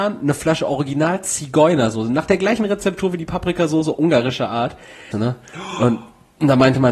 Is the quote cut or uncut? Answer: cut